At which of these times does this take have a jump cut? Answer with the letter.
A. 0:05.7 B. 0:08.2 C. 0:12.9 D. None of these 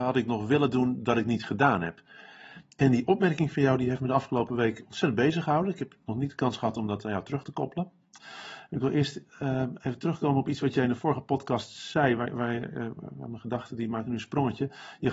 B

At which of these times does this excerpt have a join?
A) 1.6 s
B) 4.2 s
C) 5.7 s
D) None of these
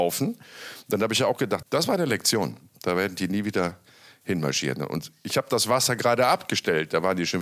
A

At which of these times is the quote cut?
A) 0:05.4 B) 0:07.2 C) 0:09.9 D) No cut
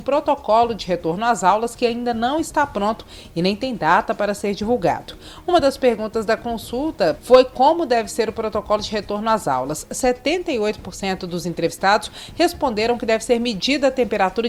B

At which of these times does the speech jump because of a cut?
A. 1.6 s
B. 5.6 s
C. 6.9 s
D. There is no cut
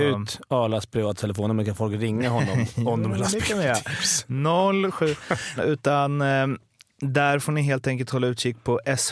B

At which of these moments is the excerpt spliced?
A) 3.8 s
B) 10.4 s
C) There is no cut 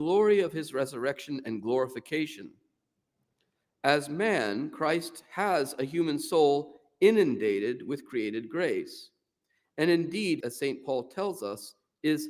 B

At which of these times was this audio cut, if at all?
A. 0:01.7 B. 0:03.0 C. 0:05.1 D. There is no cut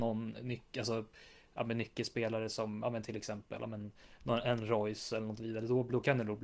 D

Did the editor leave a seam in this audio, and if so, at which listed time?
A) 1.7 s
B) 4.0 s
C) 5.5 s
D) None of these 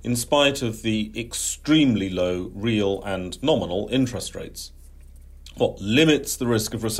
C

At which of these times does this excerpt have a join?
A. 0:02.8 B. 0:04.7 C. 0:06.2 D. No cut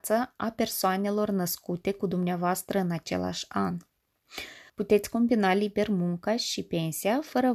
B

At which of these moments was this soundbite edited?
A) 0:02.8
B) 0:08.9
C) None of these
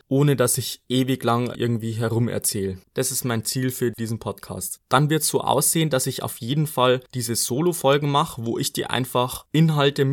A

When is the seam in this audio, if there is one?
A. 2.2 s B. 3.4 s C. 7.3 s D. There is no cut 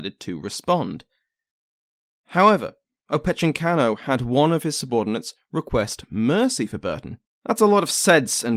C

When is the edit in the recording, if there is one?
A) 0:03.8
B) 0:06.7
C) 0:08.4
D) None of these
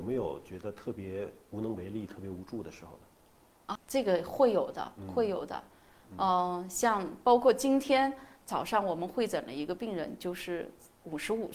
A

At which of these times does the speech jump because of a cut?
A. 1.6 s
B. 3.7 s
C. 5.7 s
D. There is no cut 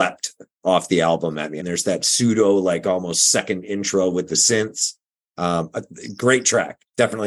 A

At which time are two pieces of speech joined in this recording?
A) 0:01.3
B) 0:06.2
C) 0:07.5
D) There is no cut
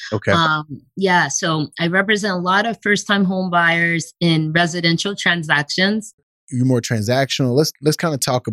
B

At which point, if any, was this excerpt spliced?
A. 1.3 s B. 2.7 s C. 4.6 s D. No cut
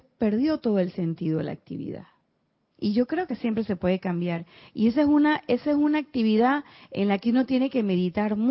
B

